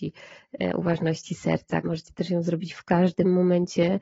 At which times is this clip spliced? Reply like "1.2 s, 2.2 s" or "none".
1.8 s